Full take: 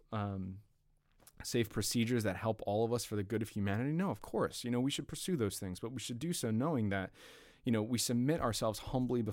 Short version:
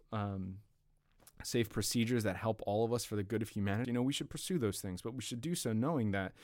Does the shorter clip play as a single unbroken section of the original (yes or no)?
no